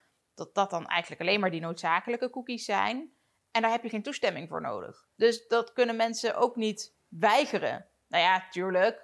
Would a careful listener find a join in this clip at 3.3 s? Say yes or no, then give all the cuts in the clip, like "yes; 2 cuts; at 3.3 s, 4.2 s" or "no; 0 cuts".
no; 0 cuts